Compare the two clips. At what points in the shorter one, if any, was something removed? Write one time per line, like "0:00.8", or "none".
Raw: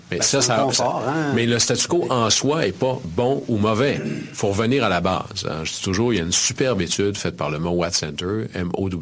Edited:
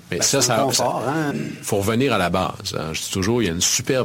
0:01.3

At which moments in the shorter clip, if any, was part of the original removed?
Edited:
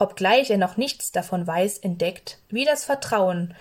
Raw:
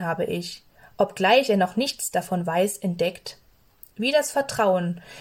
0:02.4

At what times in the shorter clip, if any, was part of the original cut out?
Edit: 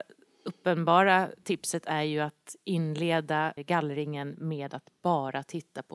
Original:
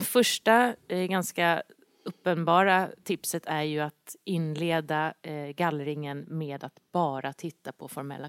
0:03.6

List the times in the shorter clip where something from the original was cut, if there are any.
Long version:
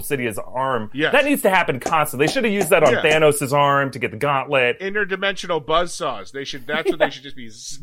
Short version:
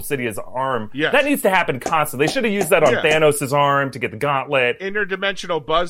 none

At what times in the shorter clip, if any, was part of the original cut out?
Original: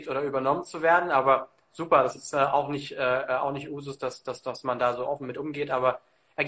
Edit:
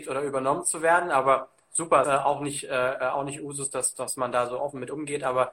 0:02.0
0:03.9

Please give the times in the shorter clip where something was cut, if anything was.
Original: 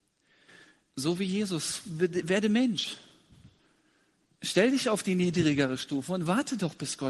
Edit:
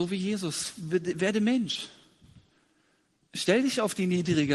none

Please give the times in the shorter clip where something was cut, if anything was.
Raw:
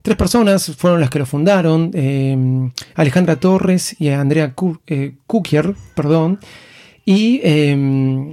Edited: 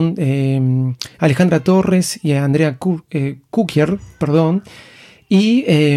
none

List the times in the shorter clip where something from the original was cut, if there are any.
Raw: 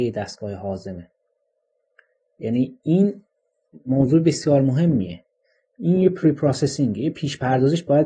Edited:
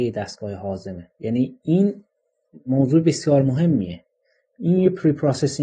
0:01.1

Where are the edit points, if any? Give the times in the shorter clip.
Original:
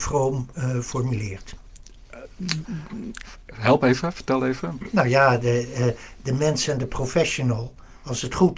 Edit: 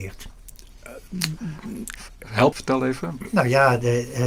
0:02.5

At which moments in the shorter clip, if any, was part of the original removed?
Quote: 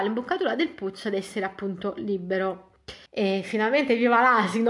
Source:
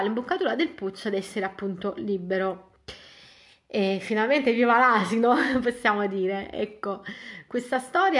0:03.1

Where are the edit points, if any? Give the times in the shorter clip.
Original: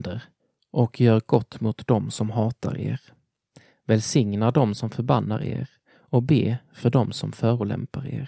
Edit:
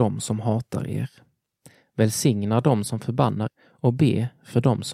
0:03.5

